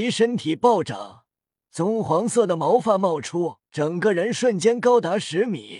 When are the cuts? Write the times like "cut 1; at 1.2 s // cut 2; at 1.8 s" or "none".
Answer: cut 1; at 1.7 s // cut 2; at 3.7 s